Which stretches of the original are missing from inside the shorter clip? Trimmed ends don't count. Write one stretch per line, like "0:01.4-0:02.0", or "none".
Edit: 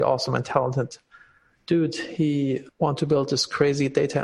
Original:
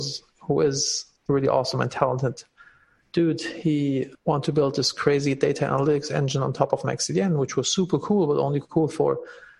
none